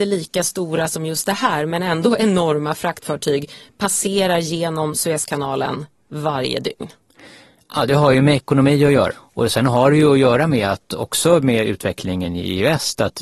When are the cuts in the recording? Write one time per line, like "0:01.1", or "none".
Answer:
0:09.1